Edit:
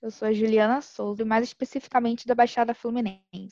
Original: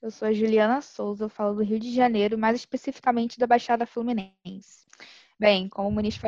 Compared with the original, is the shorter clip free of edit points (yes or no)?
no